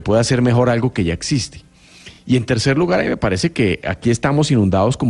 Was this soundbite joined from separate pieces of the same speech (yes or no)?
no